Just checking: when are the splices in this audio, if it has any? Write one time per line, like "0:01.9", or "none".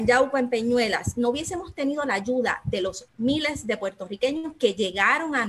0:03.1